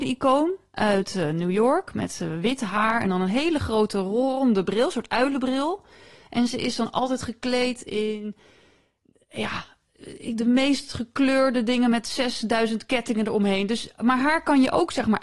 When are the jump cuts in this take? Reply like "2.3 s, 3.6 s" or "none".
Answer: none